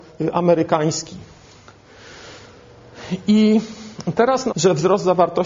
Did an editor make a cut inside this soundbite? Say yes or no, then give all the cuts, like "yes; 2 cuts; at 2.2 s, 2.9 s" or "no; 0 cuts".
yes; 1 cut; at 4.5 s